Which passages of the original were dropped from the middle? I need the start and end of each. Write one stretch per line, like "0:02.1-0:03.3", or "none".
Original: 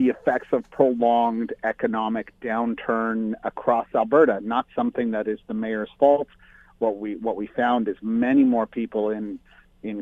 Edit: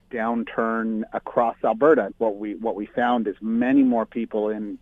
0:04.4-0:06.7

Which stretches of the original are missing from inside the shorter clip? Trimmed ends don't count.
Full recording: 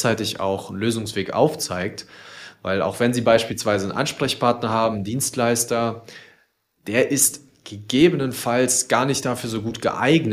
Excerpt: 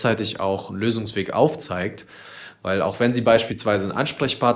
none

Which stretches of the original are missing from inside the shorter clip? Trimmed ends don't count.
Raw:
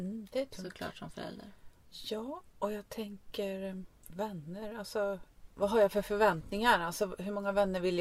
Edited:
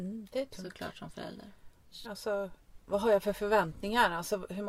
0:02.0-0:04.7

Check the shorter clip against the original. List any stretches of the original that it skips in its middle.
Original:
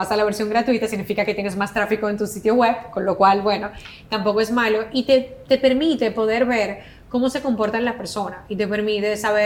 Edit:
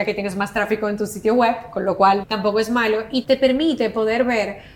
0:03.4-0:04.0
0:05.0-0:05.4

